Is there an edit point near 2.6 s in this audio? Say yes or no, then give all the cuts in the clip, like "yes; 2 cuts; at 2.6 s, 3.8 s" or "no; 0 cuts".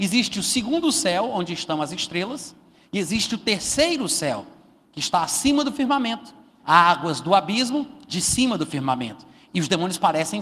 no; 3 cuts; at 6.6 s, 8.1 s, 9.5 s